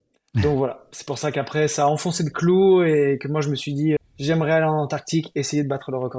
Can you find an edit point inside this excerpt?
yes; 1 cut; at 4.0 s

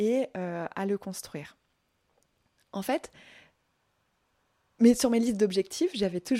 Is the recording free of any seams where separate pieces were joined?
yes; 0 cuts

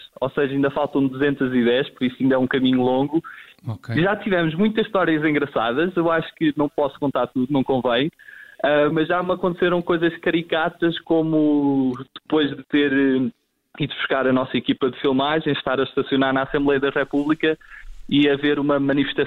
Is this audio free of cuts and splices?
yes; 0 cuts

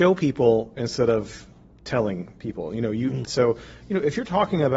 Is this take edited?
yes; 1 cut; at 3.2 s

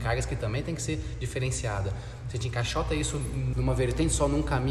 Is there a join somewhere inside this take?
yes; 1 cut; at 3.5 s

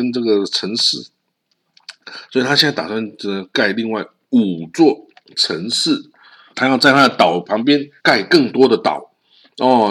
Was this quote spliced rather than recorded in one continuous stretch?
yes; 2 cuts; at 6.5 s, 8.0 s

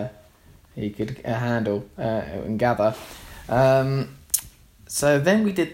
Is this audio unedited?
yes; 0 cuts

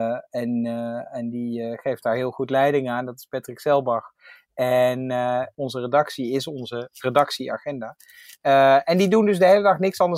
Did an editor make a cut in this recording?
yes; 1 cut; at 5.5 s

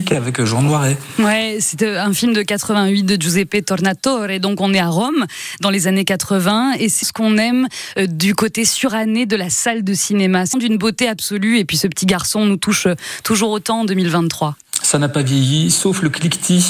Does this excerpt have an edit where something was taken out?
yes; 2 cuts; at 7.0 s, 10.5 s

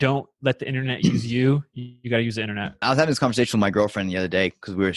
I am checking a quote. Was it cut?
yes; 1 cut; at 2.8 s

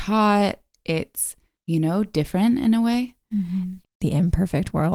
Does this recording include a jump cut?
yes; 1 cut; at 3.8 s

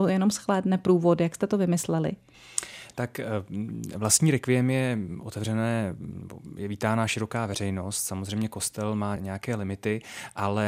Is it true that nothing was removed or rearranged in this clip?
no; 1 cut; at 9.2 s

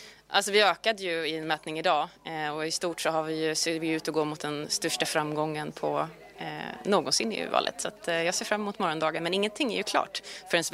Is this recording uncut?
yes; 0 cuts

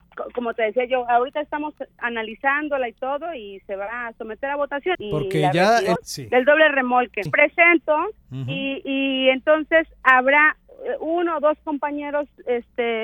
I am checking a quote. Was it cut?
yes; 3 cuts; at 4.9 s, 6.0 s, 7.3 s

